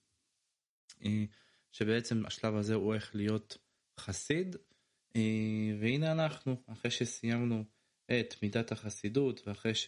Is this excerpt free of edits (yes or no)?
no